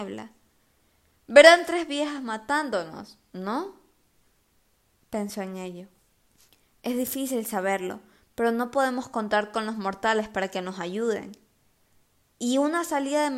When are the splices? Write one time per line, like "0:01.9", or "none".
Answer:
none

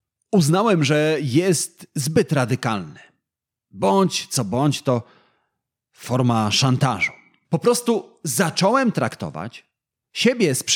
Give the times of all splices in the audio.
0:07.4

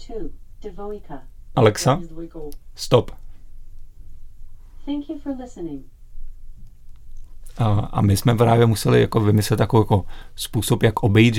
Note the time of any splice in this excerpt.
0:01.5

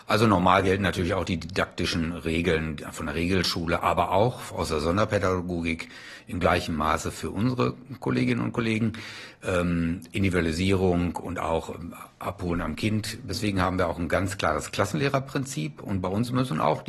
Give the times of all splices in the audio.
0:13.3

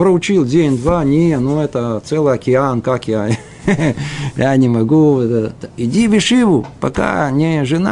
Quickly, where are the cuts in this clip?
none

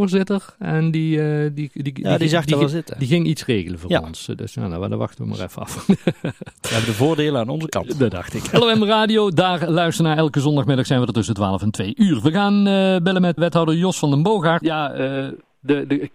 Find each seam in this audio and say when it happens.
0:13.4
0:14.6

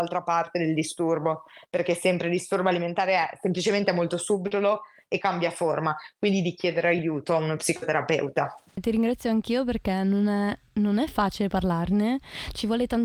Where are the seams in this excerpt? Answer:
0:08.8

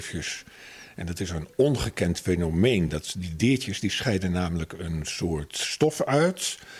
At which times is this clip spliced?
none

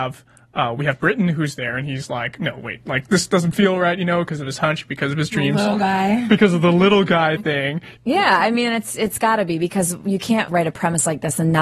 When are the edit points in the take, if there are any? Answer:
0:08.0
0:10.5

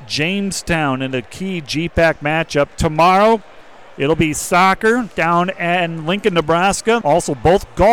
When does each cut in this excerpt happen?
0:02.7
0:07.0

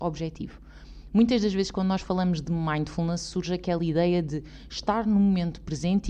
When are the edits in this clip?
none

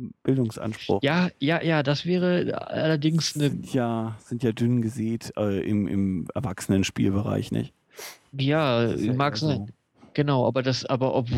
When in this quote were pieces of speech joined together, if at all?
none

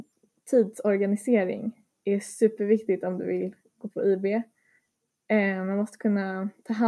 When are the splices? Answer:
none

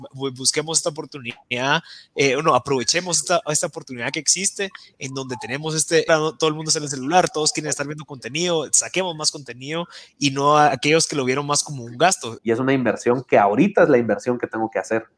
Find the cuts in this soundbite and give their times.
0:06.1
0:12.4

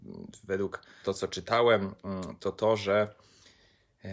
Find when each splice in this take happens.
0:01.0

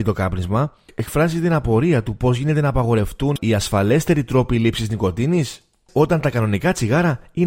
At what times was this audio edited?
none

